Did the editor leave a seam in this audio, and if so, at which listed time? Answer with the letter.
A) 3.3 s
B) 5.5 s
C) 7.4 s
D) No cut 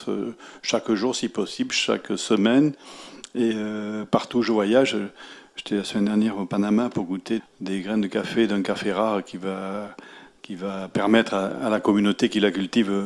C